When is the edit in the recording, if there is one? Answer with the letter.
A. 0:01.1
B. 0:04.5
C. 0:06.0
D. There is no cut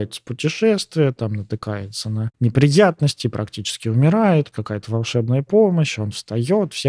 B